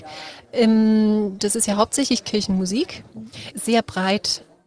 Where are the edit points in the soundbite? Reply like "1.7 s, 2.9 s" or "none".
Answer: 1.4 s, 3.5 s